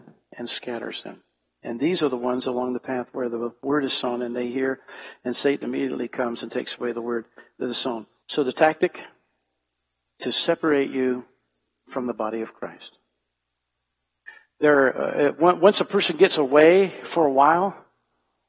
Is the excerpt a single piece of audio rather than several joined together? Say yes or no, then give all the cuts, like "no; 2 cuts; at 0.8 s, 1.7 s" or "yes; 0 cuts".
no; 2 cuts; at 1.6 s, 8.2 s